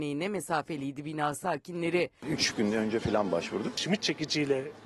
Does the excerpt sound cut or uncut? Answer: cut